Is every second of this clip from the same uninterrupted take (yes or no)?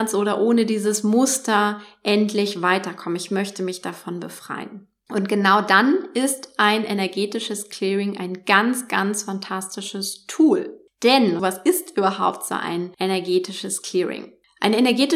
no